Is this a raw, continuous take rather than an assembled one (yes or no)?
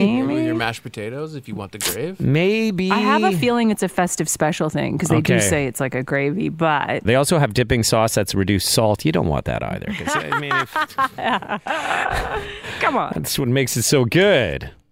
no